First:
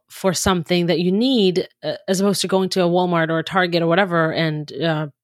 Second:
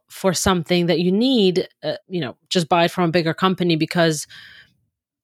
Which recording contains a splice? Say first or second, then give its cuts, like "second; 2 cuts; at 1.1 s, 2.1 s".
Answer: second; 1 cut; at 2.0 s